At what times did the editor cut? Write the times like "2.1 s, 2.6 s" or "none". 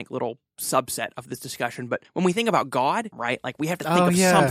3.1 s